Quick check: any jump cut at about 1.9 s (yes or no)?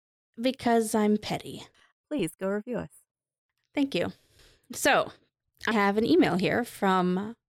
yes